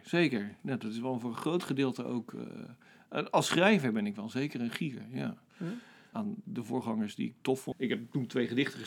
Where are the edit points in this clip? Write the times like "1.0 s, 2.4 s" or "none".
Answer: 6.1 s, 7.7 s